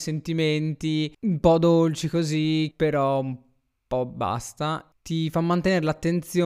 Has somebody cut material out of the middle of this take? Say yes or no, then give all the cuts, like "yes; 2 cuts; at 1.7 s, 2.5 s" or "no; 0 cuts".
yes; 2 cuts; at 1.1 s, 2.7 s